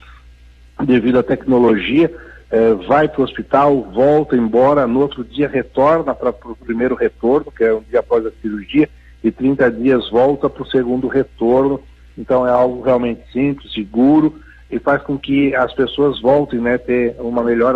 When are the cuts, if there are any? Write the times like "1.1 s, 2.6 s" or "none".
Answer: 13.6 s